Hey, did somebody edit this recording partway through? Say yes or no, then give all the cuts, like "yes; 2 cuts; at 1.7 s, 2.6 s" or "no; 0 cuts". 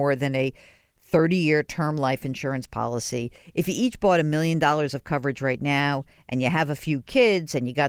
no; 0 cuts